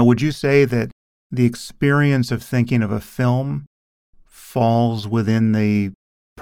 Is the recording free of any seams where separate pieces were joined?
yes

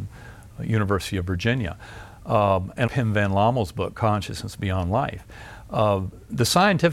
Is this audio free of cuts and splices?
no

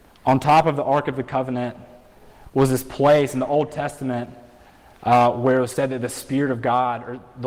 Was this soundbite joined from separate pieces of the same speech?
no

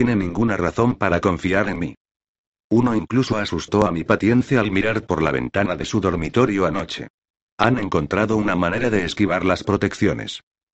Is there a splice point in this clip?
yes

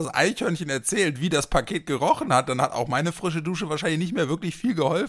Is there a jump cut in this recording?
no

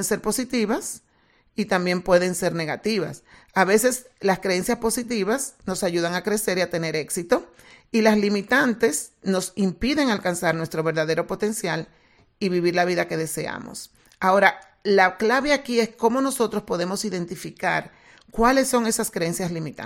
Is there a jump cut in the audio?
no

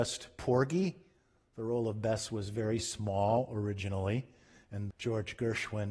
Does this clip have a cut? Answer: yes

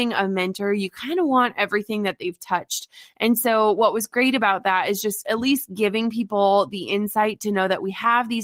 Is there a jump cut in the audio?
no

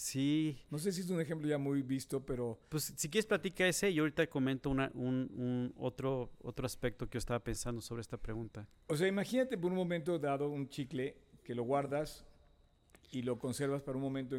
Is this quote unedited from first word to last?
no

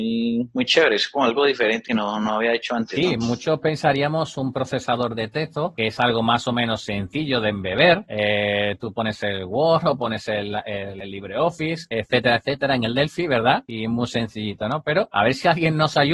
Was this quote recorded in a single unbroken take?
yes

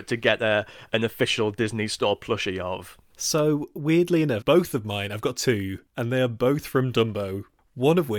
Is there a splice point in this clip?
yes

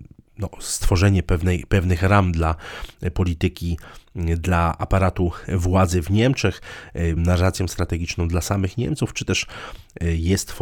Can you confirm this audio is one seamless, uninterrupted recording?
no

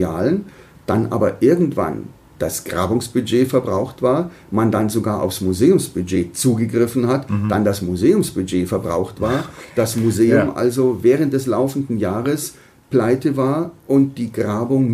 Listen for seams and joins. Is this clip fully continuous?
yes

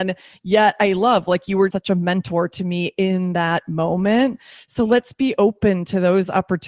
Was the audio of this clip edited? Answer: yes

